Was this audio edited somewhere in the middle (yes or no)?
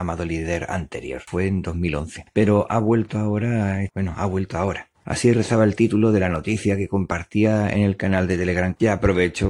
yes